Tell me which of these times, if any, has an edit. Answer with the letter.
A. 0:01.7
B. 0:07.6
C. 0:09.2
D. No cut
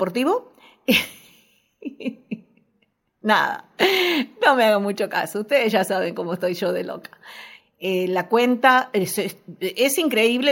B